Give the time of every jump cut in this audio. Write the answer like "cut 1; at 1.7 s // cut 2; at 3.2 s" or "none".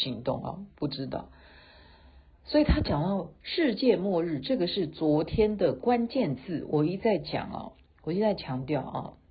none